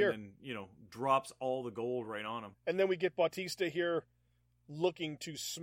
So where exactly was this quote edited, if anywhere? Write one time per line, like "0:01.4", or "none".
0:02.5